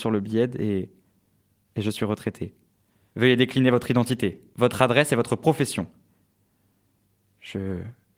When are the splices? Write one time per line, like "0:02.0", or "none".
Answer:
0:03.1
0:04.5